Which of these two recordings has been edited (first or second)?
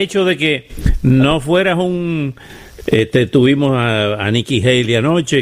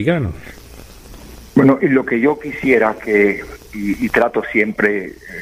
first